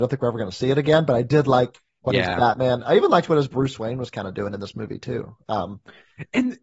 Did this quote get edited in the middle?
no; 0 cuts

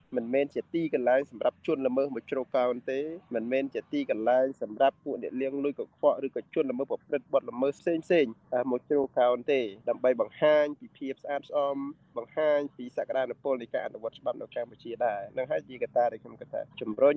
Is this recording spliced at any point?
no; 0 cuts

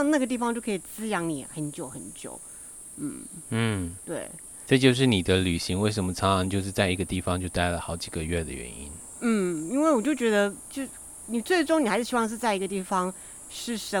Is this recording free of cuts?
yes; 0 cuts

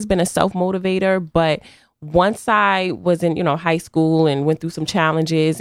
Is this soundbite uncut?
yes; 0 cuts

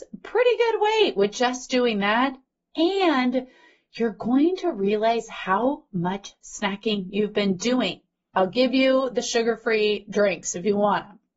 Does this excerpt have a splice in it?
yes; 1 cut; at 8.3 s

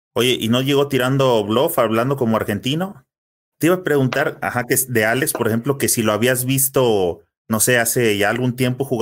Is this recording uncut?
no; 1 cut; at 3.5 s

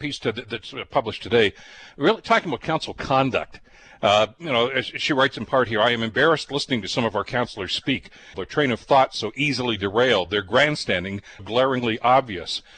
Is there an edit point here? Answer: yes; 2 cuts; at 8.3 s, 11.4 s

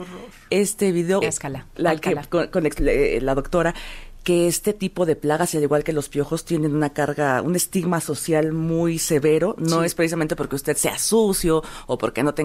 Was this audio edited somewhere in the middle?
yes; 1 cut; at 1.2 s

